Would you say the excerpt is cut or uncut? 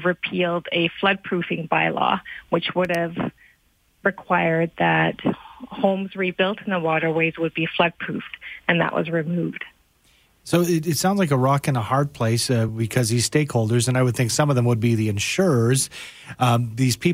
uncut